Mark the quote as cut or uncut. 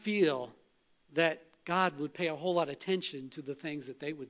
uncut